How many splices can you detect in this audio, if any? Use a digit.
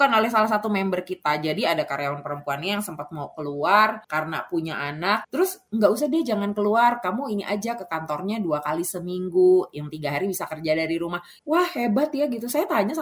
2